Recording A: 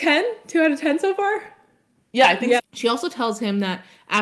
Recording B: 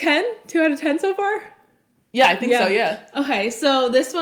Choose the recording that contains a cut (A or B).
A